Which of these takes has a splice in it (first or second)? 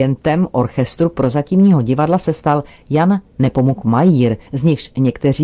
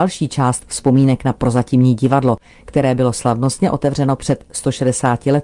first